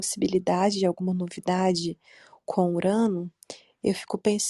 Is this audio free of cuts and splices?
yes; 0 cuts

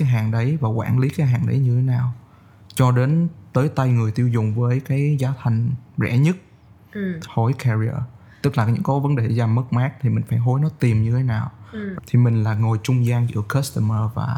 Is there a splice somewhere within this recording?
yes; 2 cuts; at 7.2 s, 12.0 s

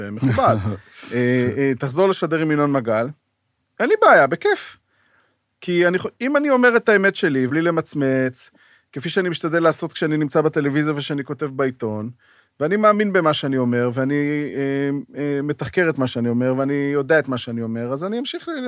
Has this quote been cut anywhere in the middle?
yes; 1 cut; at 7.5 s

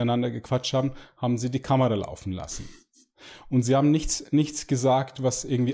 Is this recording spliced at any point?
no; 0 cuts

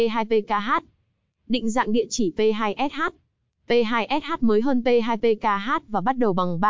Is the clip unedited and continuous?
yes; 0 cuts

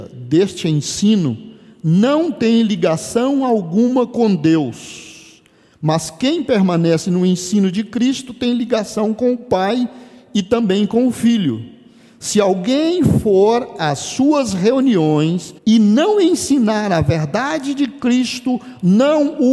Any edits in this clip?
yes; 1 cut; at 15.6 s

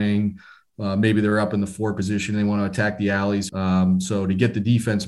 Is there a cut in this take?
yes; 1 cut; at 3.5 s

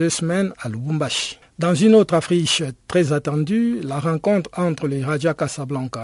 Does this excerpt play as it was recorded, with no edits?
yes; 0 cuts

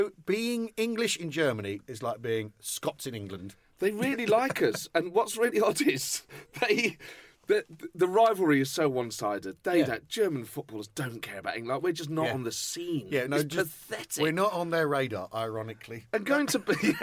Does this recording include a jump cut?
yes; 1 cut; at 13.3 s

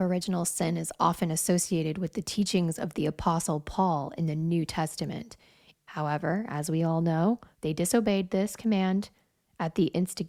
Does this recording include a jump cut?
yes; 2 cuts; at 5.7 s, 7.5 s

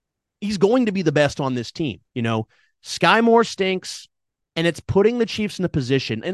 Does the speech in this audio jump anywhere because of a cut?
yes; 2 cuts; at 2.1 s, 4.4 s

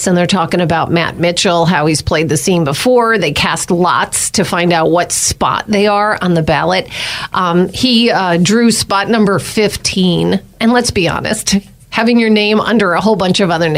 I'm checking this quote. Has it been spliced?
no; 0 cuts

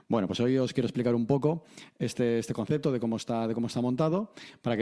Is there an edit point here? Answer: no; 0 cuts

